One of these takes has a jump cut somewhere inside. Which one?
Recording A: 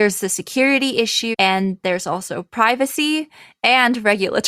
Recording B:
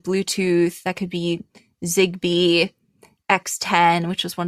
A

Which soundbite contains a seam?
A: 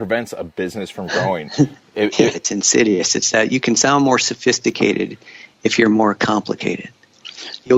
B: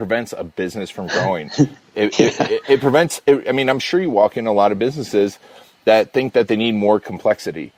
A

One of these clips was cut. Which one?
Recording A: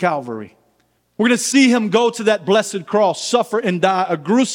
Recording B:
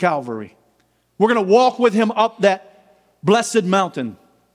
A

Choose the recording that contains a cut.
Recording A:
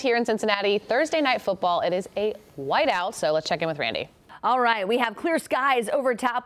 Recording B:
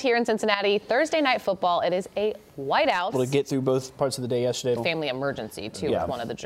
B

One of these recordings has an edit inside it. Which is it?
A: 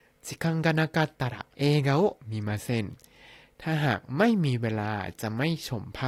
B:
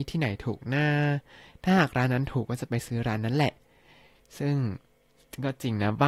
A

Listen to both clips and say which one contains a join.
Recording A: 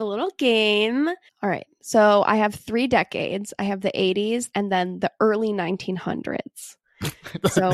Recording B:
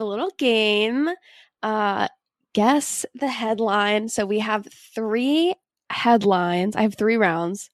A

